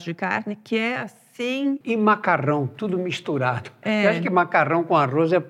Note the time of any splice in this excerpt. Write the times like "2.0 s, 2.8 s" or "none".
1.8 s